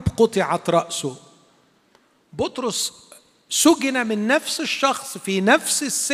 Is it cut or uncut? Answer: uncut